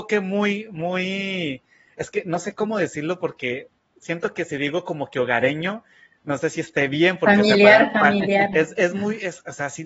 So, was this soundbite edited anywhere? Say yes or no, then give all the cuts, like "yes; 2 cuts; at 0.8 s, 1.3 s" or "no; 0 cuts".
yes; 1 cut; at 8.5 s